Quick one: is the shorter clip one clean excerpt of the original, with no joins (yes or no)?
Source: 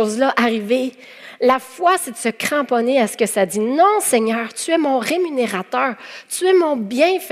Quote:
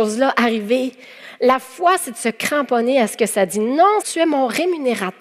no